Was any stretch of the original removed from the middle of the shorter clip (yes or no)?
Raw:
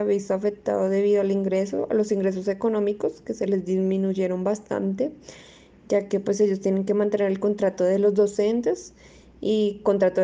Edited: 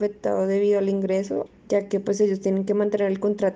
yes